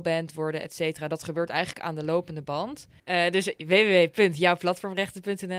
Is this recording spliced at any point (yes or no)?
yes